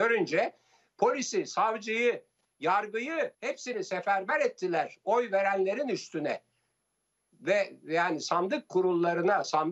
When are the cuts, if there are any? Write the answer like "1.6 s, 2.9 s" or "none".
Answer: 3.3 s